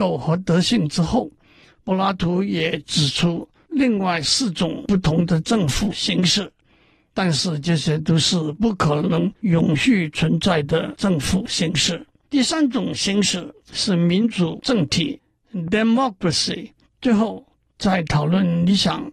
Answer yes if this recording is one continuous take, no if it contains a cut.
no